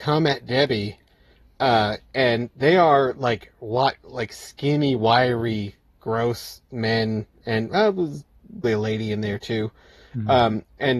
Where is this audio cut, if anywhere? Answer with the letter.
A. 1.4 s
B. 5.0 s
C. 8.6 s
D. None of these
C